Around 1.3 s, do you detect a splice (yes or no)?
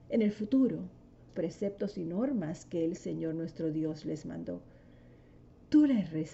yes